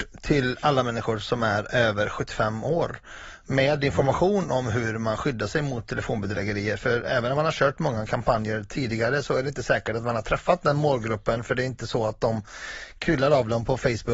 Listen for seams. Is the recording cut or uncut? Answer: uncut